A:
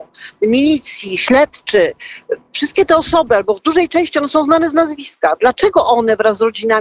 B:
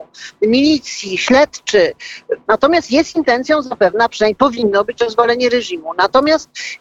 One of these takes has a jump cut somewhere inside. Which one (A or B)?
B